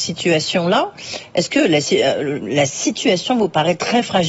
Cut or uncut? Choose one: uncut